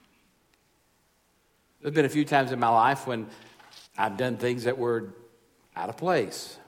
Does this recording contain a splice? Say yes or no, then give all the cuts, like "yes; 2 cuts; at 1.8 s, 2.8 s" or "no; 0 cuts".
yes; 1 cut; at 3.9 s